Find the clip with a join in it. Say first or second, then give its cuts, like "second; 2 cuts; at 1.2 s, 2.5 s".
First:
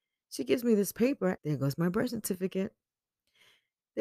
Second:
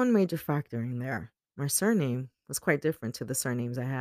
first; 1 cut; at 1.4 s